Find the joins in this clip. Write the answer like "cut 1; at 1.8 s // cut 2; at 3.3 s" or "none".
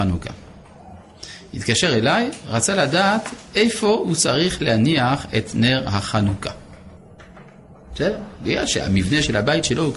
none